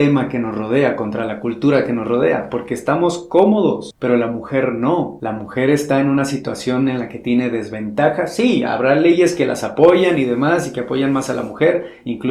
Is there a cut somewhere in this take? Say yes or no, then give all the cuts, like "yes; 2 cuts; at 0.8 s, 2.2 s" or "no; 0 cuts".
no; 0 cuts